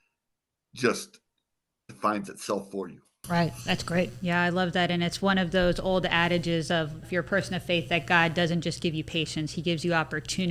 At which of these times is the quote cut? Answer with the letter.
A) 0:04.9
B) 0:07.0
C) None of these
B